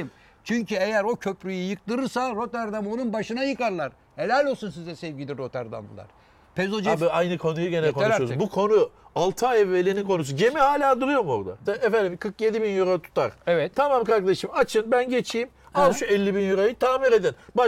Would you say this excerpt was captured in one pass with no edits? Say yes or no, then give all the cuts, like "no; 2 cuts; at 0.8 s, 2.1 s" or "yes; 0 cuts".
no; 1 cut; at 11.6 s